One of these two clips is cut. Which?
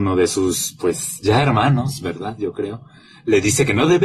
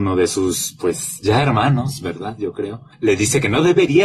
second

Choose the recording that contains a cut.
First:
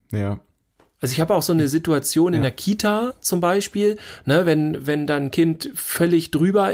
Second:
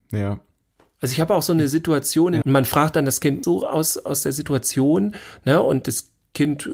second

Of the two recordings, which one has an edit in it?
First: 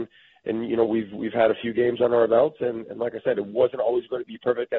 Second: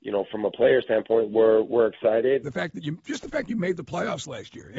second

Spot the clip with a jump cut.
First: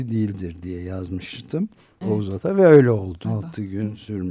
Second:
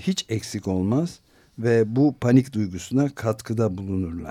first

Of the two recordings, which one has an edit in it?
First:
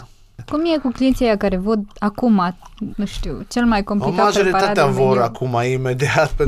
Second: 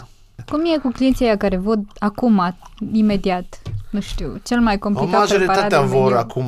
first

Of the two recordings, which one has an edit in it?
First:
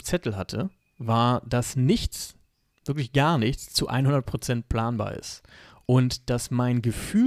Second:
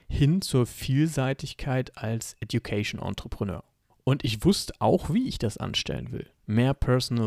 second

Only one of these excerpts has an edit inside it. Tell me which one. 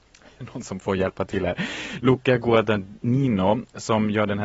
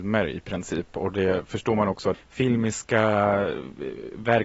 second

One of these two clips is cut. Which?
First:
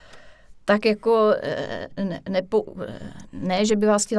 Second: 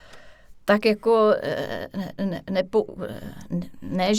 first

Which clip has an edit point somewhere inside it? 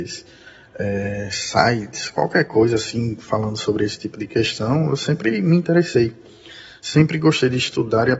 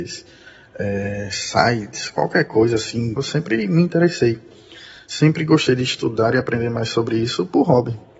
second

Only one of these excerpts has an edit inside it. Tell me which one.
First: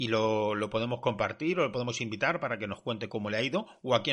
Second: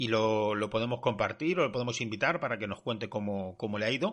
first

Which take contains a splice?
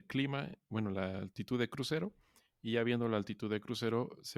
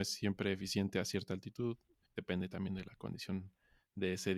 second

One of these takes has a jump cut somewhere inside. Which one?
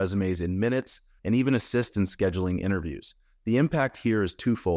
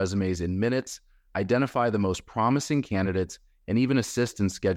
first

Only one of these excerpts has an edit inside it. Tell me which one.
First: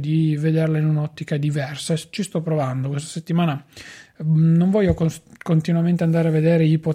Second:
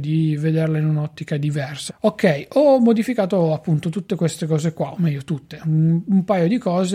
second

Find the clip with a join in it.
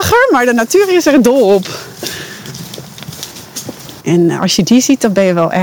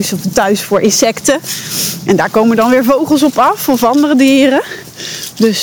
first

